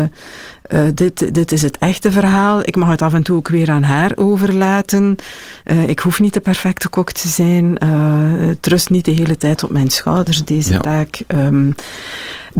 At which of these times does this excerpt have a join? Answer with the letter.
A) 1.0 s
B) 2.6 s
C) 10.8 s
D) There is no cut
D